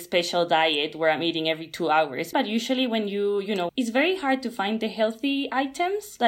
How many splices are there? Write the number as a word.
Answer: two